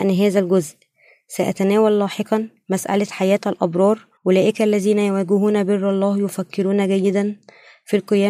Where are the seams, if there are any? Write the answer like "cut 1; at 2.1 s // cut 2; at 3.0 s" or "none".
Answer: cut 1; at 4.2 s